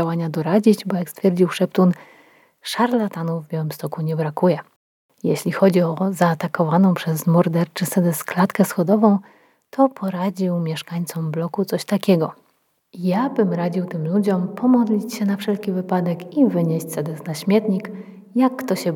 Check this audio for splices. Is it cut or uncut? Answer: uncut